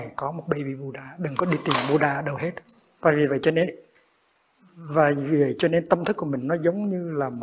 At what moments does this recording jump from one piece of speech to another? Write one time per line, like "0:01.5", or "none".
0:03.0